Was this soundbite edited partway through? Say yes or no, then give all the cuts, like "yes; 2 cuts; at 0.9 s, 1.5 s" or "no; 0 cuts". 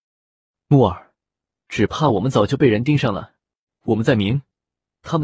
yes; 2 cuts; at 1.6 s, 3.7 s